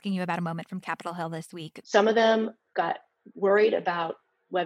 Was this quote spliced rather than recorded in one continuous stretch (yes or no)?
yes